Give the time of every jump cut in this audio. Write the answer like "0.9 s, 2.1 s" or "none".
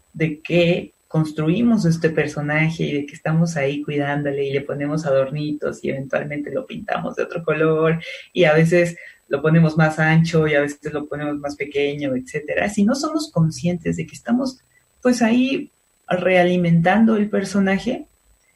none